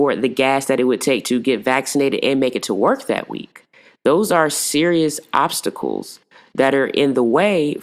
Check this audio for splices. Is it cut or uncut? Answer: uncut